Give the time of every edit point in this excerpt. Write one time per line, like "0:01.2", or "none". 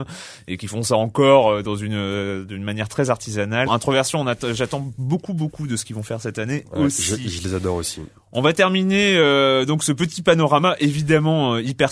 0:03.7